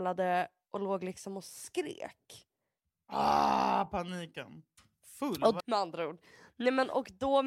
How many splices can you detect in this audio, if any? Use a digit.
1